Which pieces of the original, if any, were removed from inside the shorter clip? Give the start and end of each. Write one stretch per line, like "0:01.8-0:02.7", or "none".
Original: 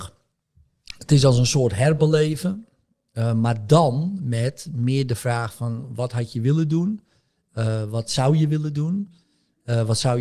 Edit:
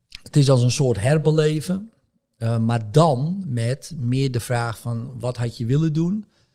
none